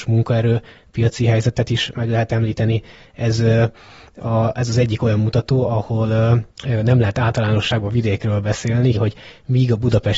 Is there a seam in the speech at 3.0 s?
no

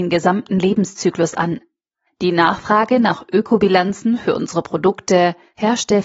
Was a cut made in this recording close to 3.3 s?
no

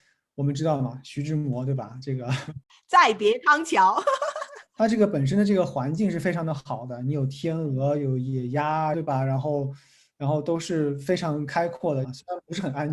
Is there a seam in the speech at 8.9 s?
yes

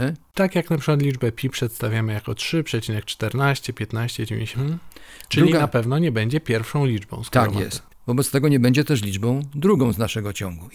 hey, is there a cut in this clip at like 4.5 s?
yes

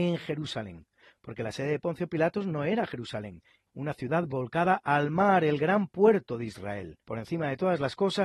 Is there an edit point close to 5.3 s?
no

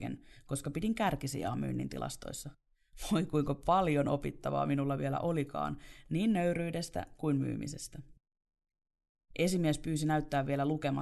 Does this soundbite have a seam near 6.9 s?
no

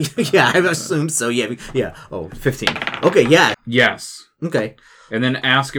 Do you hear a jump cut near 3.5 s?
yes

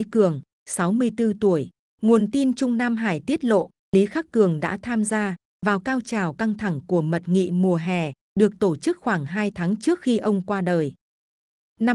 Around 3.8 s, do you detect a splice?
no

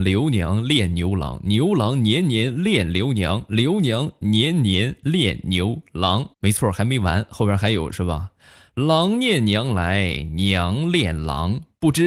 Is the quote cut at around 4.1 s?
no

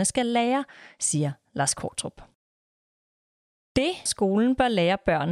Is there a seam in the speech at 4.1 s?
yes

